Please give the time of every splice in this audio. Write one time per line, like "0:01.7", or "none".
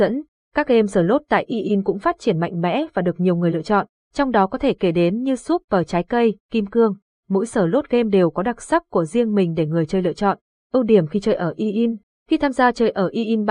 0:06.4
0:10.5